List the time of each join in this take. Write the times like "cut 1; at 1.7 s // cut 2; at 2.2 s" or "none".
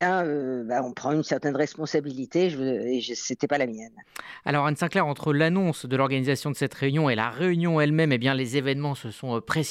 none